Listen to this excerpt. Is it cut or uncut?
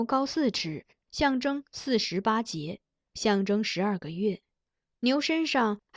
cut